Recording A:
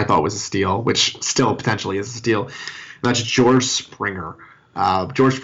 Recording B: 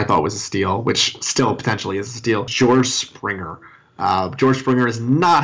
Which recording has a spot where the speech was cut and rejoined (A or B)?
B